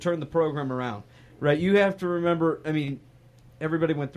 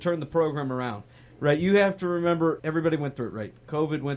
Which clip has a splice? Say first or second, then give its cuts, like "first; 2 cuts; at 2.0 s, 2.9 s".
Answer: second; 1 cut; at 2.6 s